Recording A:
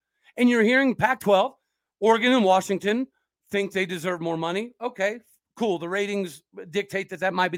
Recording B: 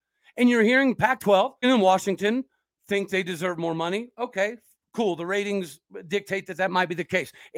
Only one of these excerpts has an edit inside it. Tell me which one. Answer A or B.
B